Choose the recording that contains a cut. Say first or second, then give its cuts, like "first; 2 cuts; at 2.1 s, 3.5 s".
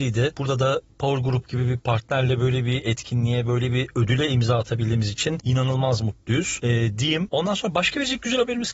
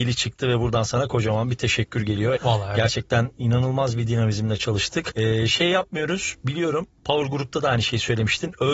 second; 1 cut; at 2.4 s